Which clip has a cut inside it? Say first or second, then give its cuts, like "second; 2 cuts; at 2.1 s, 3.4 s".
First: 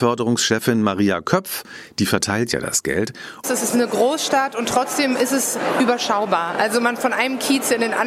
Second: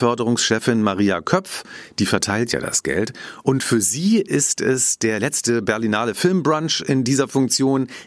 first; 1 cut; at 3.4 s